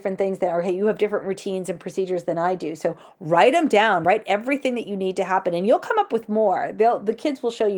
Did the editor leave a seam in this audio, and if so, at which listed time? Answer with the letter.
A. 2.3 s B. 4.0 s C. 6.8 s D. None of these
D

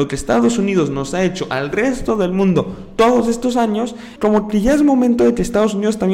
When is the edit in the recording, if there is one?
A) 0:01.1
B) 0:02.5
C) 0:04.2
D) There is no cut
C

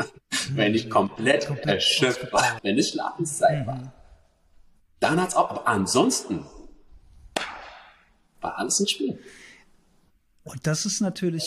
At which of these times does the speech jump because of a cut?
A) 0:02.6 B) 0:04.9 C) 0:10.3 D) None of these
A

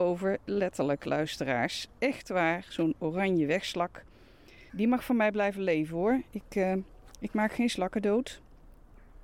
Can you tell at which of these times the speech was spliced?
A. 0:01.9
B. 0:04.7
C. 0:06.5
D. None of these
B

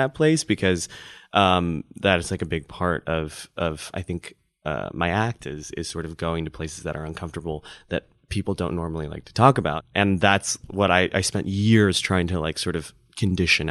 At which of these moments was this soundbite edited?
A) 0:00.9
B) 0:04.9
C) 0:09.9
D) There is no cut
D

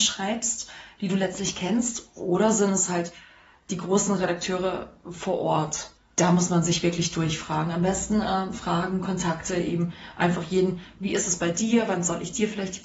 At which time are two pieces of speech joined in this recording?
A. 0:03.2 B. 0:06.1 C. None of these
B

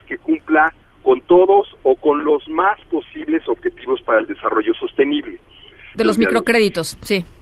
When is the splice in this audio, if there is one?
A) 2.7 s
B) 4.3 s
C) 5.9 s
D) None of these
C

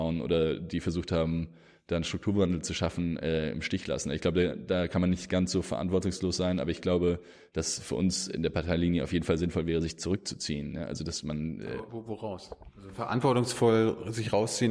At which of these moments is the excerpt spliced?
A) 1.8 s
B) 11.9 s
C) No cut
C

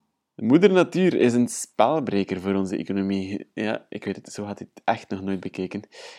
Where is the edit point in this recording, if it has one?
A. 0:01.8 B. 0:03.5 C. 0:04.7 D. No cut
D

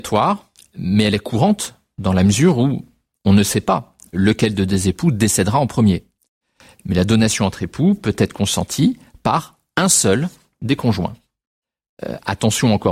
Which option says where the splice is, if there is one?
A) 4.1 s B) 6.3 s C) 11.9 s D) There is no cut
A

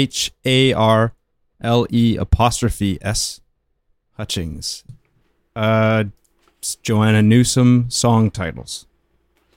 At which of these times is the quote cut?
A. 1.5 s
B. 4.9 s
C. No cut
B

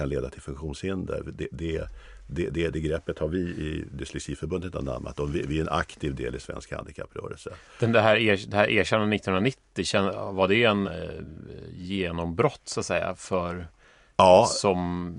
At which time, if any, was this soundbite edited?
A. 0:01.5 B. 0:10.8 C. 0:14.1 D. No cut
B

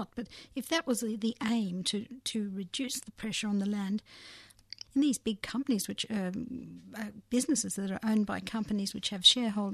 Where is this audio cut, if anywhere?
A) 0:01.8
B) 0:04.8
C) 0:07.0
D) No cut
B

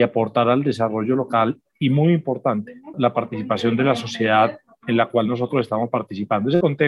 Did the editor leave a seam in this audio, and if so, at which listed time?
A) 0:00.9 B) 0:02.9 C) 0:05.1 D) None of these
B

